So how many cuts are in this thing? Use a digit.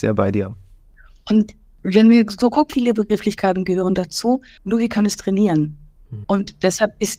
3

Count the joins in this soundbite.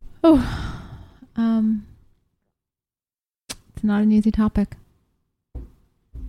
0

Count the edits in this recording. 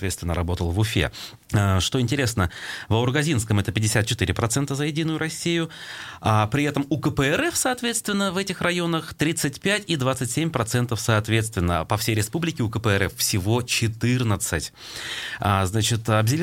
1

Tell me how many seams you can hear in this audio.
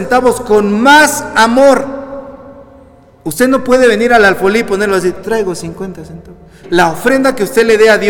1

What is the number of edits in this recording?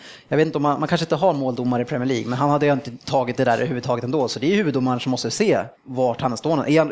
1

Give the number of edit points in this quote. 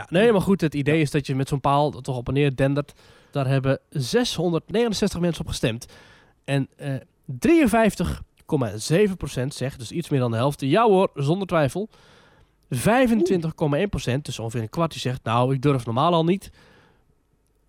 1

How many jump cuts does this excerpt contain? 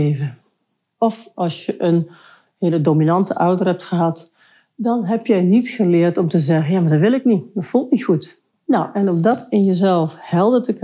1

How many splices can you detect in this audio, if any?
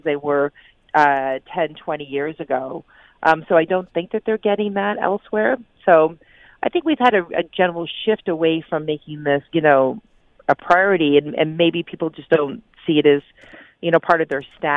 1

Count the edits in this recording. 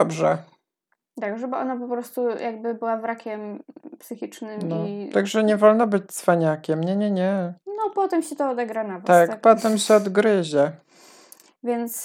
0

